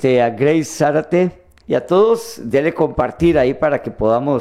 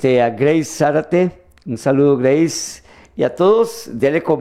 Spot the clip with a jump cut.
first; 1 cut; at 1.6 s

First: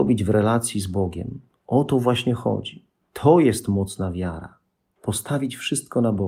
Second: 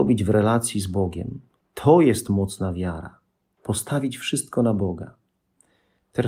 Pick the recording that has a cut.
second; 1 cut; at 1.6 s

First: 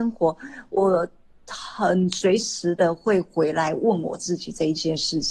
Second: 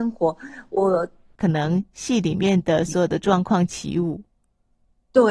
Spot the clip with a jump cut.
second; 1 cut; at 1.4 s

